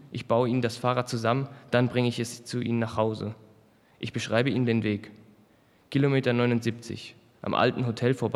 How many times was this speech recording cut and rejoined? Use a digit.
0